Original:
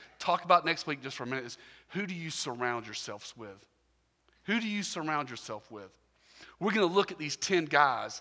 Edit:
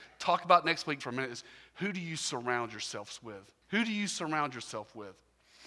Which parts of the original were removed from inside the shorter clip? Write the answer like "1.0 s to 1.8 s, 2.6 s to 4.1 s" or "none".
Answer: 1.0 s to 1.1 s, 3.8 s to 4.4 s